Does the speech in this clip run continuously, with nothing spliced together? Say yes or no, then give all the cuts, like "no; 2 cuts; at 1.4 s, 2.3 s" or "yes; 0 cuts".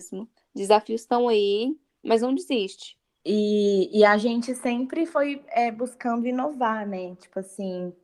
no; 1 cut; at 3.2 s